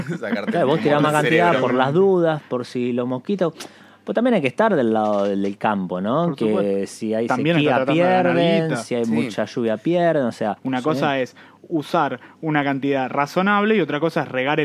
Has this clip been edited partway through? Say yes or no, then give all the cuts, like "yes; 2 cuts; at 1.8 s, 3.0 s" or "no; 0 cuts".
yes; 1 cut; at 10.6 s